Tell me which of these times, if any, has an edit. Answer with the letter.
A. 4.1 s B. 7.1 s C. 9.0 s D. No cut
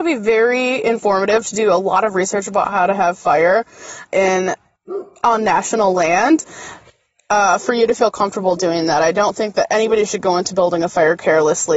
A